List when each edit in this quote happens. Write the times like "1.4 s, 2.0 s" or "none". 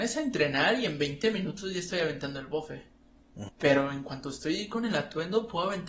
3.5 s